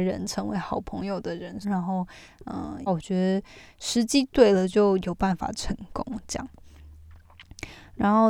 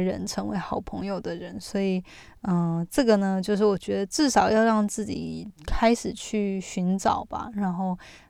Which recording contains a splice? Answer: first; 2 cuts; at 1.6 s, 2.9 s

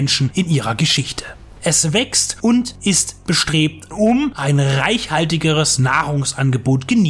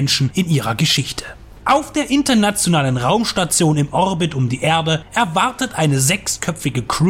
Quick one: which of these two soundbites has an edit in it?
first; 2 cuts; at 1.6 s, 3.9 s

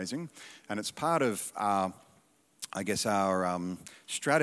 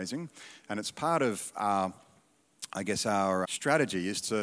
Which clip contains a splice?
second; 1 cut; at 3.4 s

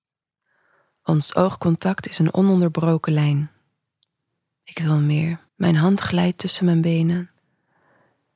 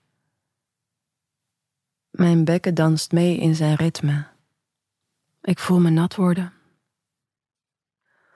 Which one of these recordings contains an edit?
first; 1 cut; at 5.5 s

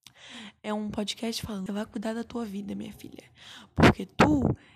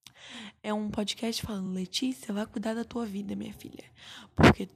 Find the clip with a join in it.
first; 1 cut; at 1.7 s

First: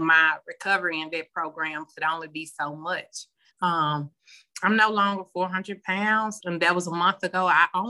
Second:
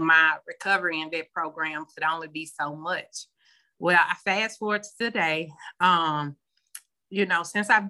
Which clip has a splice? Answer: first; 2 cuts; at 3.5 s, 6.4 s

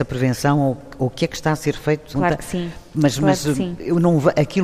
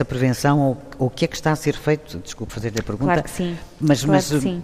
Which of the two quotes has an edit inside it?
first; 1 cut; at 2.1 s

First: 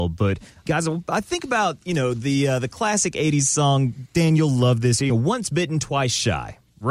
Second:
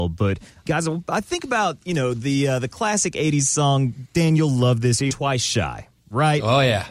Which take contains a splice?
second; 1 cut; at 5.1 s

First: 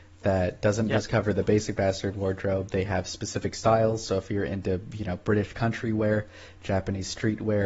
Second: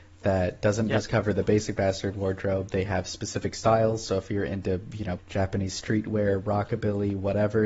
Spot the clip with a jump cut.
second; 1 cut; at 5.2 s

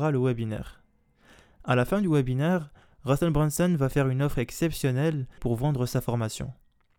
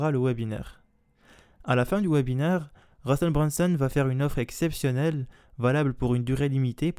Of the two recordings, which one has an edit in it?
first; 1 cut; at 5.4 s

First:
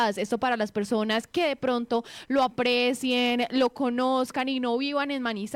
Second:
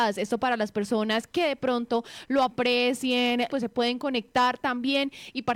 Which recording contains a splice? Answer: second; 1 cut; at 3.5 s

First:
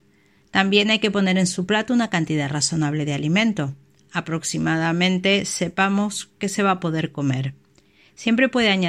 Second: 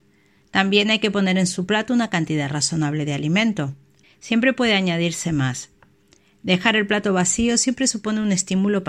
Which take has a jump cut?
second; 1 cut; at 4.0 s

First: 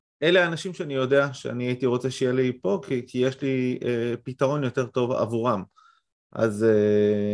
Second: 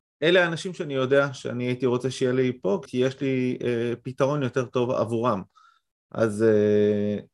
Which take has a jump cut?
second; 1 cut; at 2.9 s

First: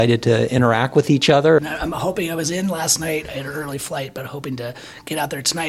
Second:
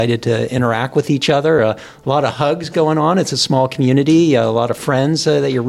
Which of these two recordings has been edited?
first; 1 cut; at 1.6 s

